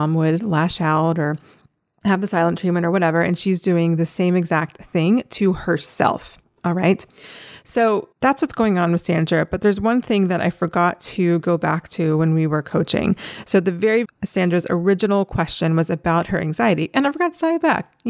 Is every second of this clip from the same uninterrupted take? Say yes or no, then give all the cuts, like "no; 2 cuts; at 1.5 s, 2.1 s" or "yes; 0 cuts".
no; 2 cuts; at 8.1 s, 14.0 s